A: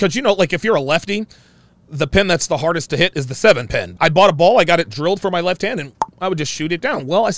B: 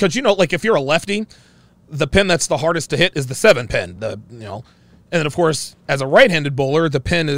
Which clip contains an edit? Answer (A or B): A